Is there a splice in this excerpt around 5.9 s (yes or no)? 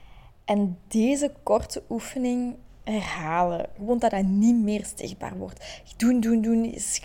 no